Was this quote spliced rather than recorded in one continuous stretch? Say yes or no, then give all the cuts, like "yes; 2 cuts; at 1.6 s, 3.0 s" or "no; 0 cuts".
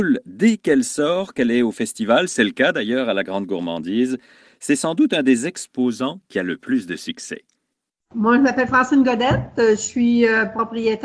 no; 0 cuts